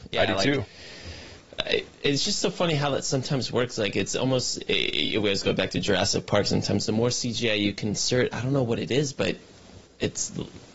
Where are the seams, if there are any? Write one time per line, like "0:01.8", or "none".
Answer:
none